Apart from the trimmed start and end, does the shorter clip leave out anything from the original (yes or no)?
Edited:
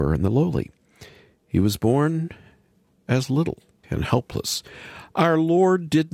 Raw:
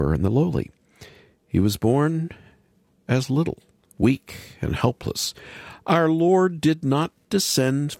yes